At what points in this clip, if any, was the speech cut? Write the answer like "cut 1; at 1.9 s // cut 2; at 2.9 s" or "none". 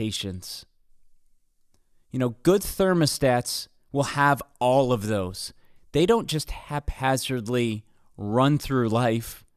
none

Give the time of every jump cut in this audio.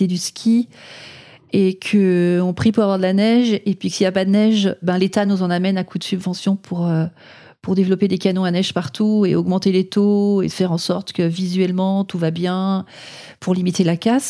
cut 1; at 4.8 s

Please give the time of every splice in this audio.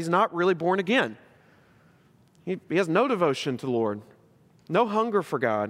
none

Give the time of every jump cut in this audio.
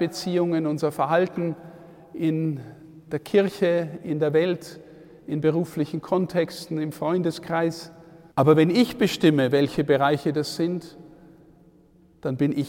cut 1; at 8.3 s

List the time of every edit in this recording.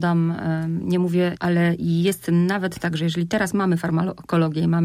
cut 1; at 1.4 s

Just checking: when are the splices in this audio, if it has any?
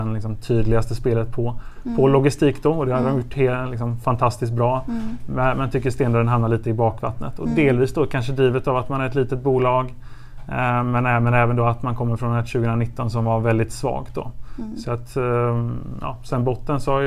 none

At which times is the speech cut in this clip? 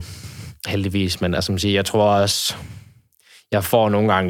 none

